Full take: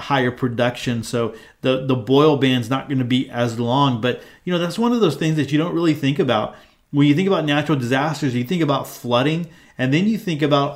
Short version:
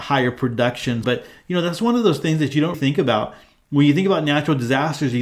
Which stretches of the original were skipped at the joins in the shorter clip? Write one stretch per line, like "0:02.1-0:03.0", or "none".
0:01.0-0:04.0
0:05.7-0:05.9